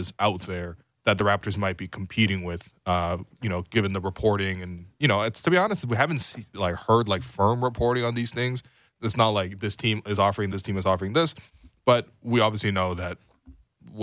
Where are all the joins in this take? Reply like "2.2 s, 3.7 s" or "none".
10.5 s